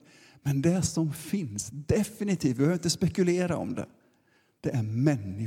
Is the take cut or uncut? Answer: uncut